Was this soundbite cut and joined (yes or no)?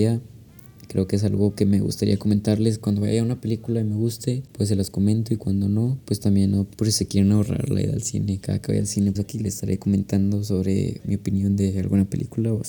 yes